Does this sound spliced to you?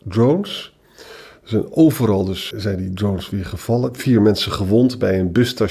yes; 1 cut; at 2.5 s

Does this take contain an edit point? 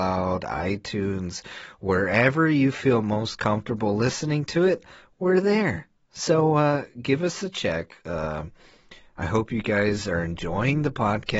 no; 0 cuts

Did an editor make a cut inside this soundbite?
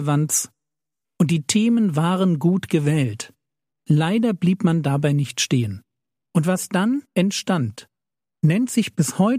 no; 0 cuts

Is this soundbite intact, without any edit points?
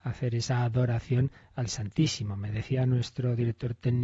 yes; 0 cuts

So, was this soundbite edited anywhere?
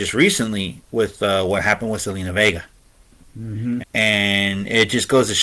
yes; 1 cut; at 3.8 s

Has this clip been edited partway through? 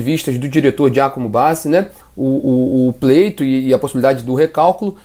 yes; 1 cut; at 2.0 s

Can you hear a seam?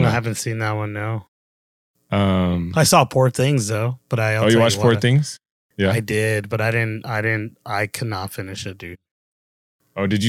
no; 0 cuts

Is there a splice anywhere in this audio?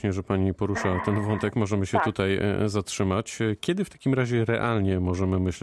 no; 0 cuts

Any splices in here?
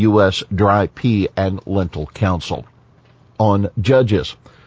yes; 1 cut; at 3.4 s

